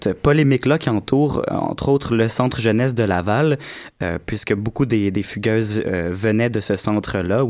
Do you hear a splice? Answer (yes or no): no